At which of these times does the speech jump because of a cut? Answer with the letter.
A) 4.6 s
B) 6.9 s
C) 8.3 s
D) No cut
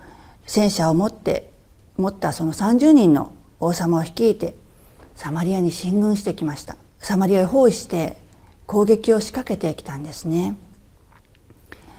B